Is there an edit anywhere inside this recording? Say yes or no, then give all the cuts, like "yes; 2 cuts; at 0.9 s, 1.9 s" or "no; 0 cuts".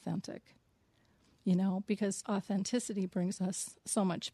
no; 0 cuts